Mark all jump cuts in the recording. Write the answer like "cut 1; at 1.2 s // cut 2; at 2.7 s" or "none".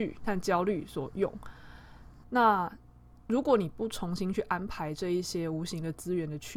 cut 1; at 2.2 s